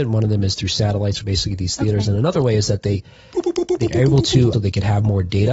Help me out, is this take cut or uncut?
cut